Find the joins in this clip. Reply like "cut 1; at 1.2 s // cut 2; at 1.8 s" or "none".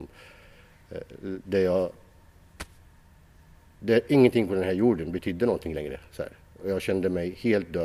none